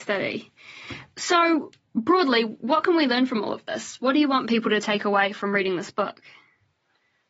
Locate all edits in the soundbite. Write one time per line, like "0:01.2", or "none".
none